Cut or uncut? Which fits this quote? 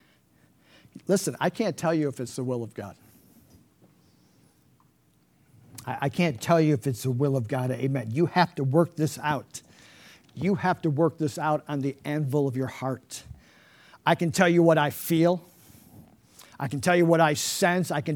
uncut